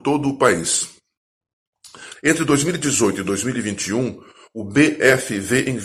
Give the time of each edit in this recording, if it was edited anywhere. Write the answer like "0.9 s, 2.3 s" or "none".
2.1 s